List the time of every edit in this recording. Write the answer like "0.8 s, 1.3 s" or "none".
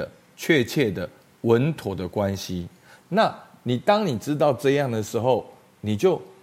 3.0 s